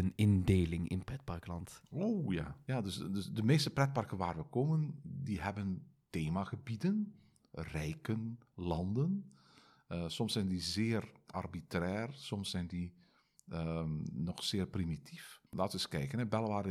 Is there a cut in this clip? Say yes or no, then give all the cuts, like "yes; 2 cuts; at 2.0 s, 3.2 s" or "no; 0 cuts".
yes; 1 cut; at 15.5 s